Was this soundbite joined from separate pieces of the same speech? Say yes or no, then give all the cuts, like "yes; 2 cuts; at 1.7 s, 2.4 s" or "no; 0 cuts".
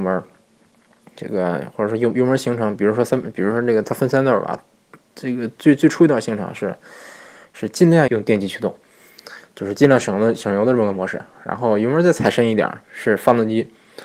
yes; 1 cut; at 8.1 s